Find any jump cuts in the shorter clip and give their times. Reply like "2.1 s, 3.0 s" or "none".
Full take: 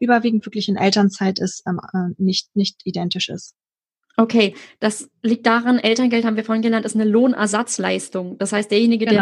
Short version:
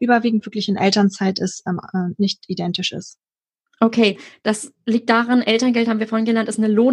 2.1 s